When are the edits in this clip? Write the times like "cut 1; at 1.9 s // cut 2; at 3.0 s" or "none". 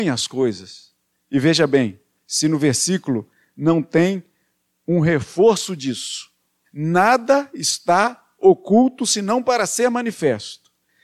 cut 1; at 6.6 s